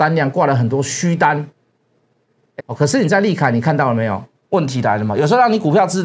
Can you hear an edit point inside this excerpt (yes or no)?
yes